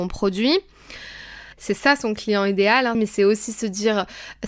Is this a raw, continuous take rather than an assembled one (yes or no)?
no